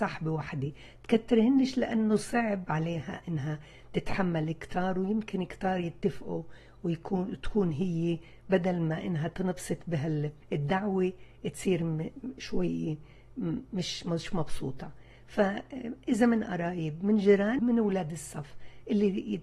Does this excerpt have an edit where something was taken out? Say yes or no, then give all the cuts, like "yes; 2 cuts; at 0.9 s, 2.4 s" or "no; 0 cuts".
yes; 2 cuts; at 10.4 s, 17.6 s